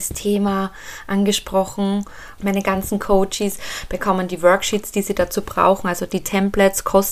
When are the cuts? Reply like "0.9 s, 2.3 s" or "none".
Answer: 2.4 s